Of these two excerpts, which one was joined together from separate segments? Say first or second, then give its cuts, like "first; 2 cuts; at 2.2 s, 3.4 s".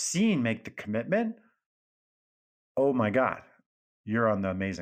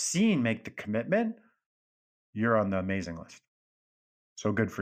second; 1 cut; at 2.1 s